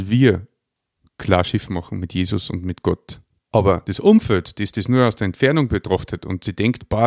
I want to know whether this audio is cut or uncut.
cut